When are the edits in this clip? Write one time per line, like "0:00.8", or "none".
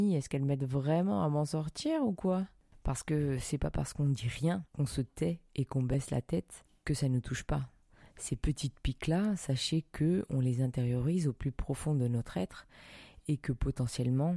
0:04.7